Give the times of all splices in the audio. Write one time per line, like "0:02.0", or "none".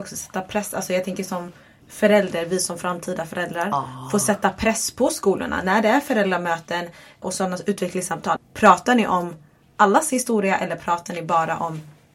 0:07.2
0:08.4